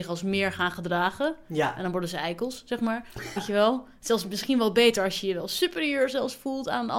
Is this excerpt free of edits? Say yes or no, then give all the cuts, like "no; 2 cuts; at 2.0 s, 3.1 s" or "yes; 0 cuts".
no; 1 cut; at 3.4 s